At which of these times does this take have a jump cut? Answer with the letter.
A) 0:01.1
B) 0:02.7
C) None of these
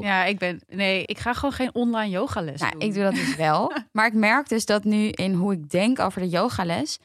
A